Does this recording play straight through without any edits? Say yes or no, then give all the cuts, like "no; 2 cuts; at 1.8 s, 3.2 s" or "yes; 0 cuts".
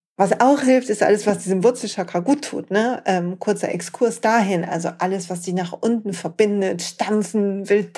yes; 0 cuts